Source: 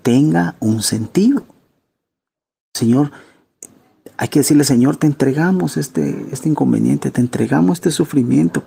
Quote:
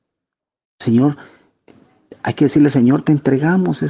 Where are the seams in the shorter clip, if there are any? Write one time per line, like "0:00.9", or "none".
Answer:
none